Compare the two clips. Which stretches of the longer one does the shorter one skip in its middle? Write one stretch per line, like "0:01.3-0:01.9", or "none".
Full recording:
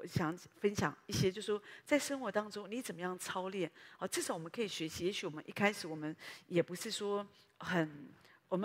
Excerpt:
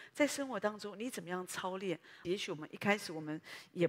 0:04.0-0:05.0